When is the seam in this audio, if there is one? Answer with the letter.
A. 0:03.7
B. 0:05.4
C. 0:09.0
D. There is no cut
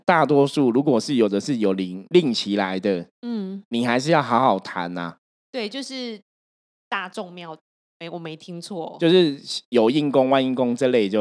B